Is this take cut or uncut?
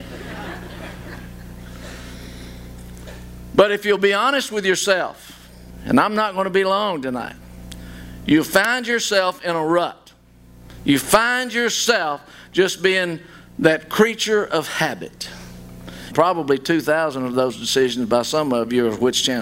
cut